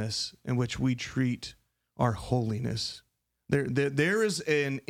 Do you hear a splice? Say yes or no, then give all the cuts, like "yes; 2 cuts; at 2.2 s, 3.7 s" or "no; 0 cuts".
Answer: no; 0 cuts